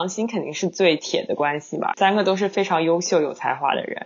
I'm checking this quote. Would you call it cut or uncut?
cut